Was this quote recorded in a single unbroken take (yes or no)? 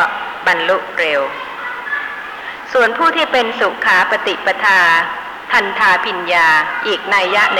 yes